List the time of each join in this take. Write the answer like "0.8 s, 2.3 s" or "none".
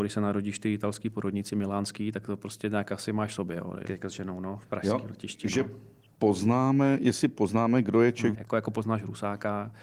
3.8 s, 8.3 s